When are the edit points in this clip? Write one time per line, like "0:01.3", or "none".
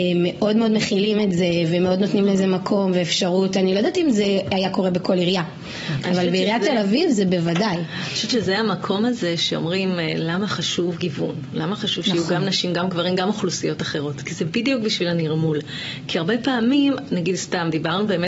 none